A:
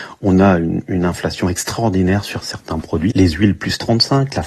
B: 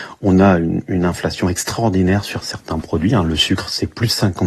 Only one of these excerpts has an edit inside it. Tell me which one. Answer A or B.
A